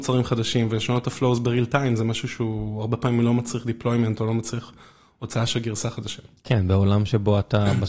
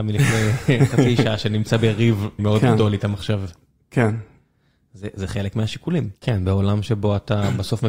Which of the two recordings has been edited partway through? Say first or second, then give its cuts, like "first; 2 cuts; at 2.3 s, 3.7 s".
second; 2 cuts; at 2.4 s, 6.2 s